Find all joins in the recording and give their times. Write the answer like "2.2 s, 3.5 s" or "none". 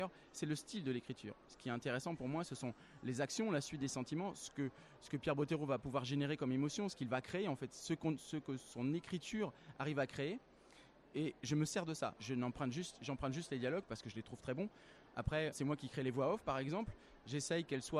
12.2 s, 15.5 s